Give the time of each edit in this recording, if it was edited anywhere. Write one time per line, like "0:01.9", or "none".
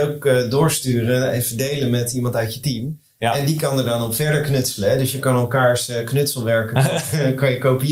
none